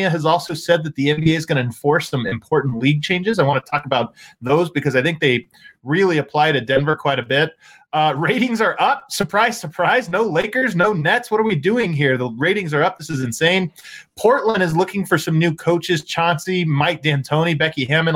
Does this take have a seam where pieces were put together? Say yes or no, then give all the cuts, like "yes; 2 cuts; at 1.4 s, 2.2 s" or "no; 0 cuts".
no; 0 cuts